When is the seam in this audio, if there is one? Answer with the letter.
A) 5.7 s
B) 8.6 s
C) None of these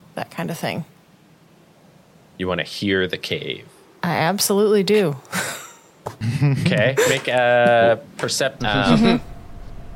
B